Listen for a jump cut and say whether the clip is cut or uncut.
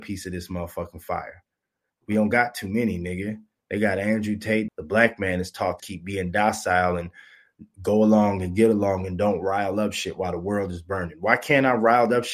cut